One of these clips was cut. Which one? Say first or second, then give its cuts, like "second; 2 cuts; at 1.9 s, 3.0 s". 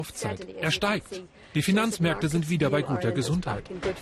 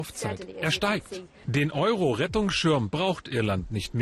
second; 1 cut; at 1.4 s